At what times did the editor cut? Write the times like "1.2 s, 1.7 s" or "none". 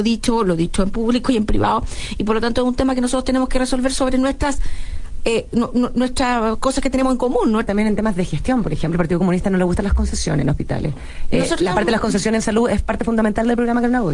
7.7 s

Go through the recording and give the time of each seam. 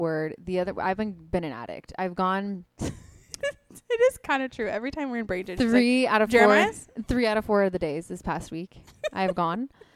none

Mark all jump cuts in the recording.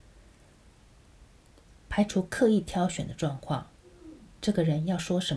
none

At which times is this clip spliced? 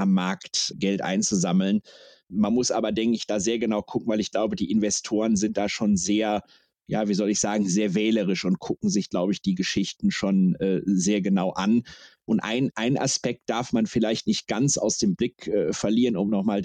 none

